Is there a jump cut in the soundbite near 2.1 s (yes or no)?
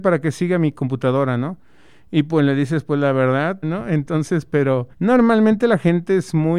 no